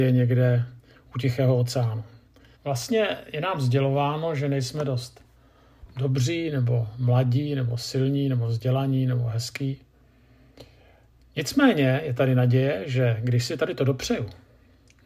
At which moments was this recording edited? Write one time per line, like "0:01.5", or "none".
0:02.6